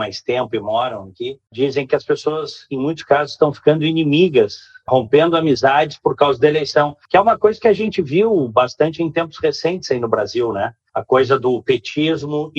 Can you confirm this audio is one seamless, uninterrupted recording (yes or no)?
yes